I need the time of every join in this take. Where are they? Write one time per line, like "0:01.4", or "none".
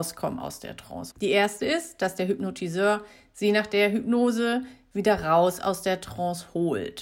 0:01.1